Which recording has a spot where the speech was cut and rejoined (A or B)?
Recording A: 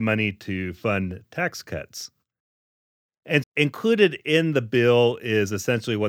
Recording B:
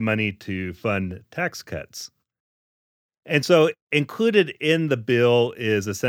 A